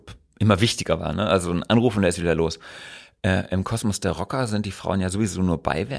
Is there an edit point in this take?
no; 0 cuts

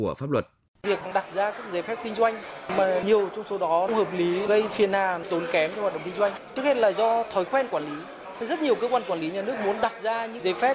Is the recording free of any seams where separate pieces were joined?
yes; 0 cuts

